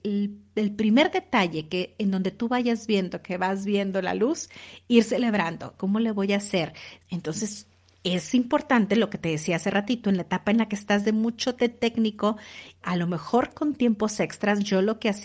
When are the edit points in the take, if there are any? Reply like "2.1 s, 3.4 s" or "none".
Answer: 5.8 s, 7.0 s, 12.8 s